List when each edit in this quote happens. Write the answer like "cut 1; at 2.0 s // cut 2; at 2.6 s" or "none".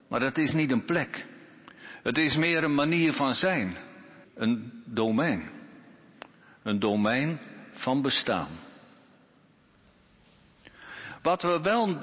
cut 1; at 4.2 s

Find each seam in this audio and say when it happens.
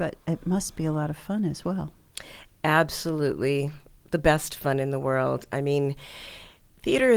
none

